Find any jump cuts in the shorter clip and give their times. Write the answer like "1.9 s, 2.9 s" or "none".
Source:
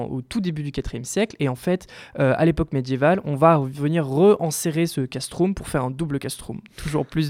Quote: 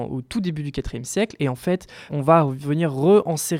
2.1 s